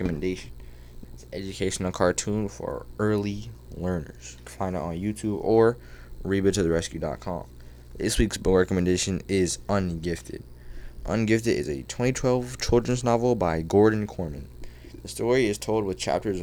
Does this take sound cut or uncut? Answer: cut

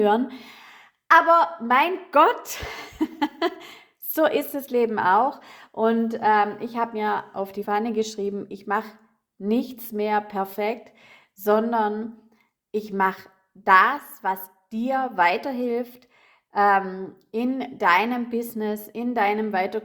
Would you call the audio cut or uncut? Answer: cut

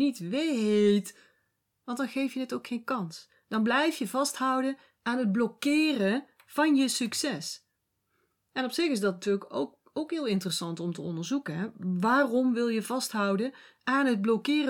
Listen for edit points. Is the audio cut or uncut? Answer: uncut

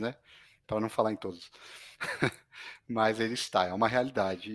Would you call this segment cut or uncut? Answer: uncut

